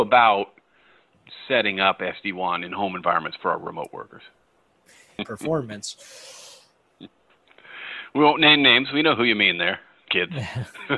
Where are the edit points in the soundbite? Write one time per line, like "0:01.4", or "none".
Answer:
0:05.2